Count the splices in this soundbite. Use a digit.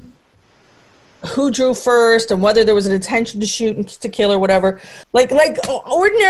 1